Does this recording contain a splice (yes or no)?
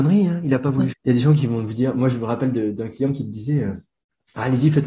yes